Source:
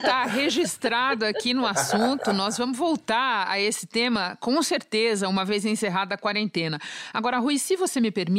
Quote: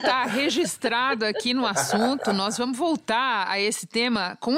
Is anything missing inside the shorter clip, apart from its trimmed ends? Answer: no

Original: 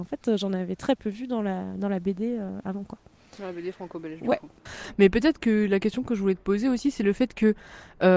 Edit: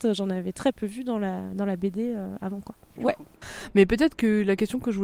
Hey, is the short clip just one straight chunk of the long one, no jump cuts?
no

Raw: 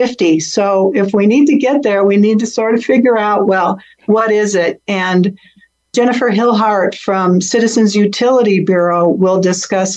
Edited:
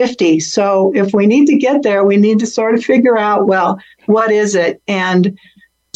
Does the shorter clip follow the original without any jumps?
yes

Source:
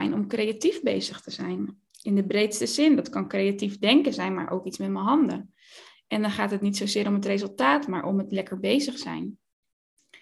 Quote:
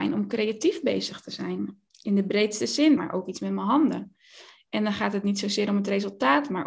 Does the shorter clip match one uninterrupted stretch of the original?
no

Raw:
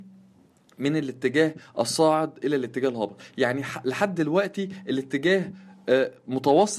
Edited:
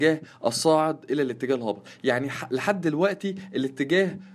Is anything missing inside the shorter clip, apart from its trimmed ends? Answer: no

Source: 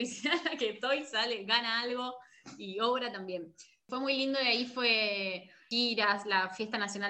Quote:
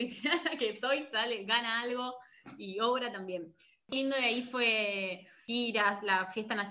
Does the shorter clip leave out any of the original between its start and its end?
yes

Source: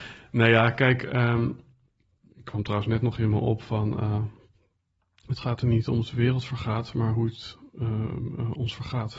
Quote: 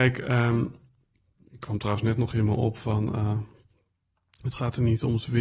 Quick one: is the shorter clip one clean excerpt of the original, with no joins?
yes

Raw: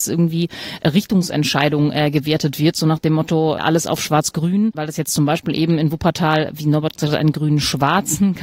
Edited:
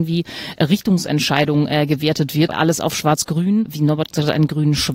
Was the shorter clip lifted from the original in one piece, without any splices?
no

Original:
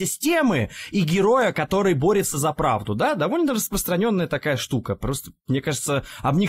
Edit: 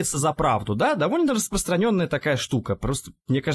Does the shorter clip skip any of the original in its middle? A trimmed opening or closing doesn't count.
no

